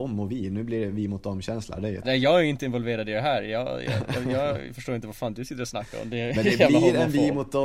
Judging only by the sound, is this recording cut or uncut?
cut